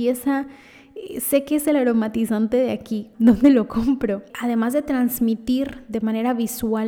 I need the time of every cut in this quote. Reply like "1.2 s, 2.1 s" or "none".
3.1 s, 4.3 s